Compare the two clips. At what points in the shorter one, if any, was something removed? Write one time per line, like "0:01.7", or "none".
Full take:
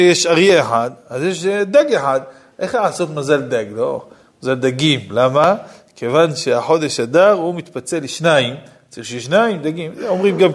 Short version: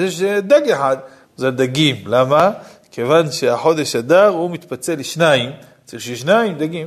0:01.2